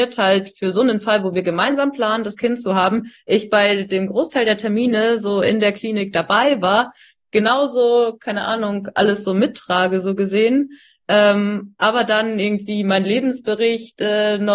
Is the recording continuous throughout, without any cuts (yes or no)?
yes